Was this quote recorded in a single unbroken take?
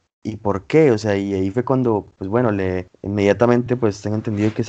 yes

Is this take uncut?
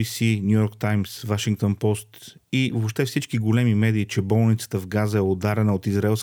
yes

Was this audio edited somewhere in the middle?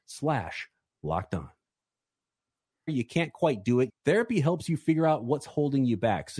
yes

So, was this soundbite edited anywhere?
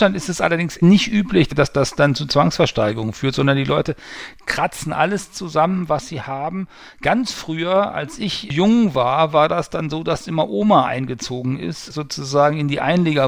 no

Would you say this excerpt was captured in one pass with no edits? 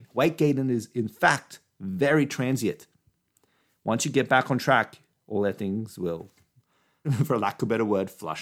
no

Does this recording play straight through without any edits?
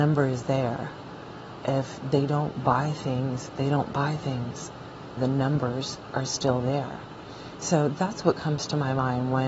no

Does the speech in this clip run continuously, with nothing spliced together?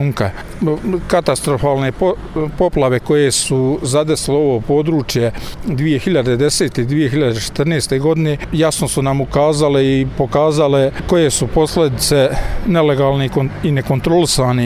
yes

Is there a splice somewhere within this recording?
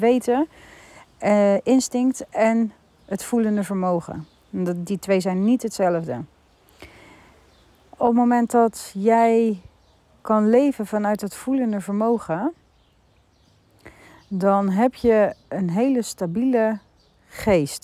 no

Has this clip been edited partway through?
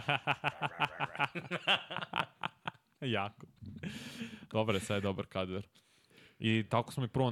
no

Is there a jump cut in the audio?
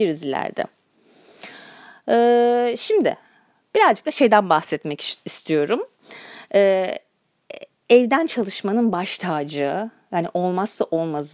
no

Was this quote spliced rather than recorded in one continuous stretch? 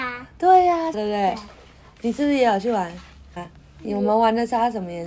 yes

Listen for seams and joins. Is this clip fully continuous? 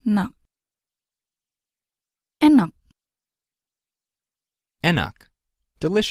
yes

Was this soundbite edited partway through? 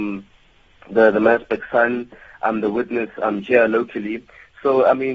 no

